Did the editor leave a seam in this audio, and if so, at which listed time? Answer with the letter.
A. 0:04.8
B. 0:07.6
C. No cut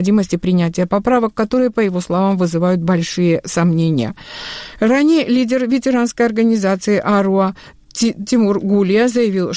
C